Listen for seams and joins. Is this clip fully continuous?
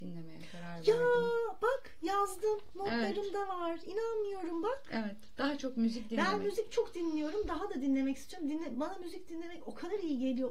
yes; 0 cuts

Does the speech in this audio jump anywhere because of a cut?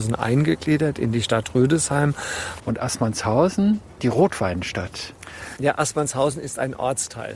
yes; 2 cuts; at 2.6 s, 5.6 s

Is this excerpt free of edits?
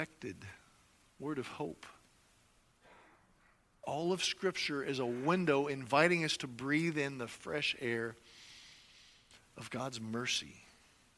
yes; 0 cuts

